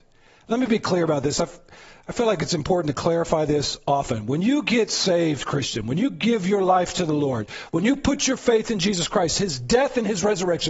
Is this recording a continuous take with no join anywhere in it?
yes; 0 cuts

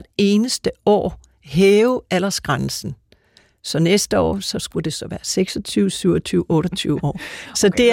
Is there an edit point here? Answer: no; 0 cuts

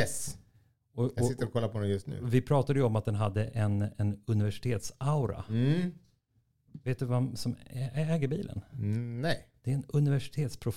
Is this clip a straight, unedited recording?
yes; 0 cuts

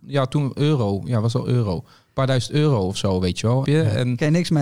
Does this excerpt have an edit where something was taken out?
yes; 1 cut; at 3.7 s

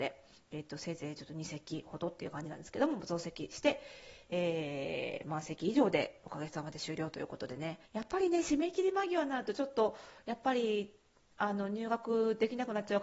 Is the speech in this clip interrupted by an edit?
yes; 1 cut; at 7.9 s

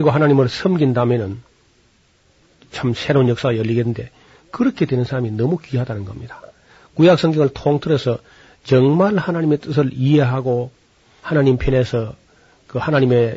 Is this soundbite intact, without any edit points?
yes; 0 cuts

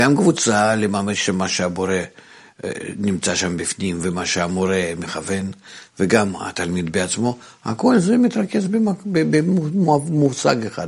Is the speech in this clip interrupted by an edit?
no; 0 cuts

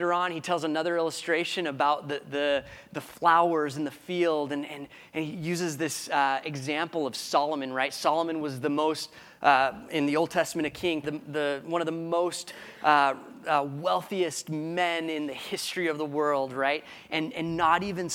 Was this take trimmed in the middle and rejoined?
yes; 1 cut; at 11.0 s

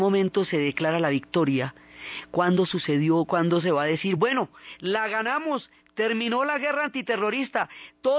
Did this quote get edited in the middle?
no; 0 cuts

